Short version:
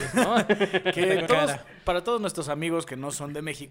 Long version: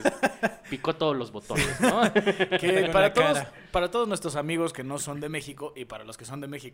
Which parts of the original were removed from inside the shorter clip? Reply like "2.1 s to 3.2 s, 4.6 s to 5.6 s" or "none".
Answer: 2.9 s to 3.1 s